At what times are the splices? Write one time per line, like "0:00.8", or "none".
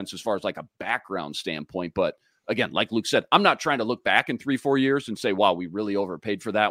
none